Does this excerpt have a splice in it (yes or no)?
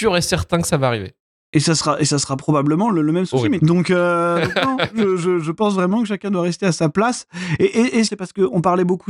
yes